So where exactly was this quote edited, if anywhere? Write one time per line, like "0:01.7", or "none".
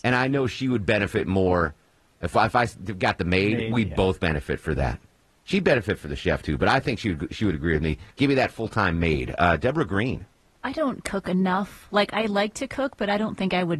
none